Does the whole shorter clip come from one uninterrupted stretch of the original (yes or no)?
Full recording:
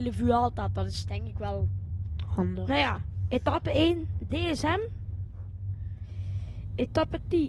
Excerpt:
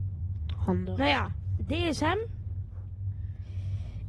no